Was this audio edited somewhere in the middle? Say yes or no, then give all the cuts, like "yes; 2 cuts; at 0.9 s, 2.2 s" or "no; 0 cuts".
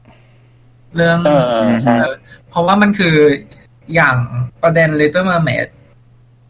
yes; 2 cuts; at 2.1 s, 4.5 s